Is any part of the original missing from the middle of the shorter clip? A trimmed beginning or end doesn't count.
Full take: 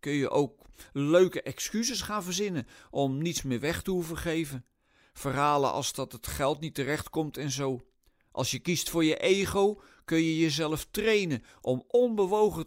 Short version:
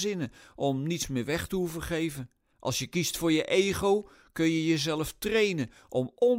yes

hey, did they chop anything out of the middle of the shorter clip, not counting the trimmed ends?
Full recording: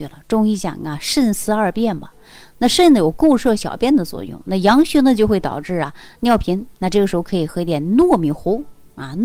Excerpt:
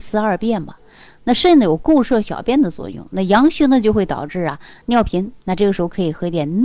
no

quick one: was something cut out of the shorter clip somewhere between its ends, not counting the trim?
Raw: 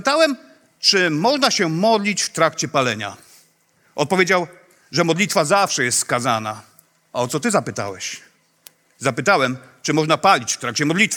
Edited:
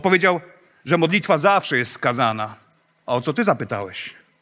no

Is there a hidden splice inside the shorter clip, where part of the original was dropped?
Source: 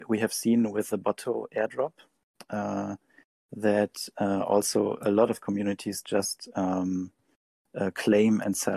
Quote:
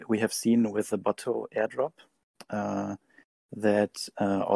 no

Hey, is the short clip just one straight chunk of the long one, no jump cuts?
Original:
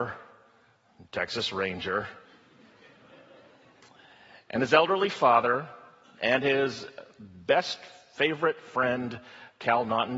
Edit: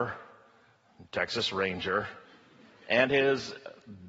no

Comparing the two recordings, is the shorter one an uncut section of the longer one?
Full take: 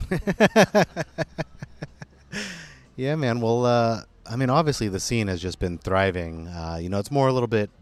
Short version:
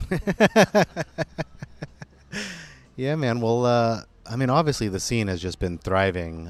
yes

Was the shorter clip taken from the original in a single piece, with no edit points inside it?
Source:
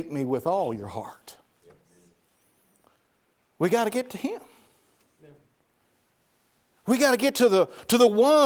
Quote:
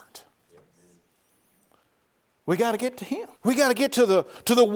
no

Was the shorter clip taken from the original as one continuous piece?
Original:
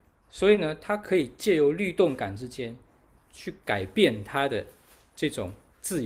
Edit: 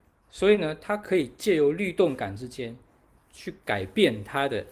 yes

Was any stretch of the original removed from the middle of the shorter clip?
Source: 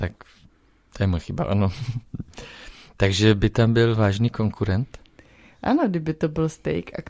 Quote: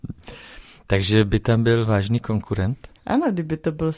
yes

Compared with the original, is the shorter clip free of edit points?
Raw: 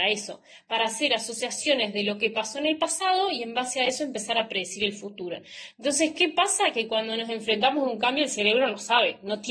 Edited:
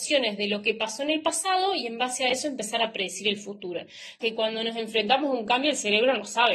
no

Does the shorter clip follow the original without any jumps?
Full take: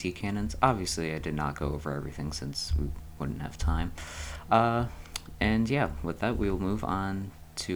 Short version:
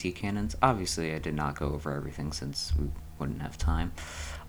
yes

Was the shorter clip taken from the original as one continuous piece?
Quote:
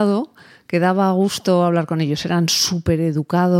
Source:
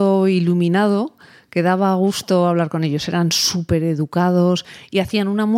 yes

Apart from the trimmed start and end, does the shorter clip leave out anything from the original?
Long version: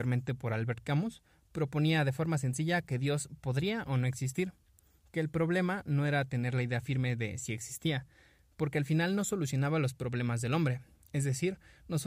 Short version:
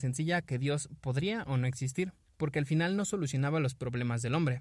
yes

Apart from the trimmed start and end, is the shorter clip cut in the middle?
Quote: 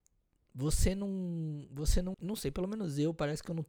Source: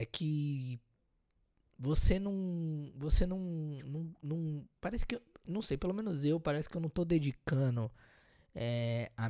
yes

